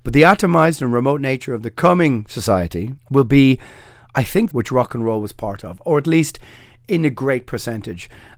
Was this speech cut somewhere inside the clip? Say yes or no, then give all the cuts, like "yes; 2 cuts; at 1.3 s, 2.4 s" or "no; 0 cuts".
yes; 2 cuts; at 3.0 s, 4.5 s